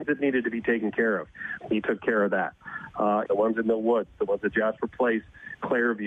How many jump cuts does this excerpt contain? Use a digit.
2